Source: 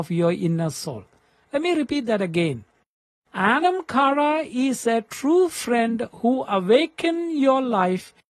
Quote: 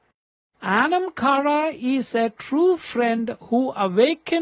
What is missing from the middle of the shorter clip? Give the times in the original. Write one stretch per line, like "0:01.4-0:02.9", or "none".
none